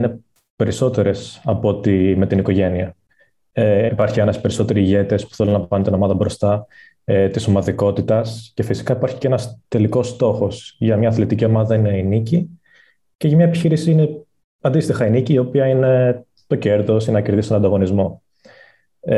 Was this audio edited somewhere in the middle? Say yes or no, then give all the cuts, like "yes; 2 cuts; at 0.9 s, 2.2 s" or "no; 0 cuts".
yes; 1 cut; at 3.9 s